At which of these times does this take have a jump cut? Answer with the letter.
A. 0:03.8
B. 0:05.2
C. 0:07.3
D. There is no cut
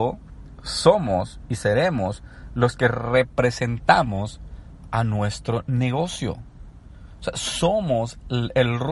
D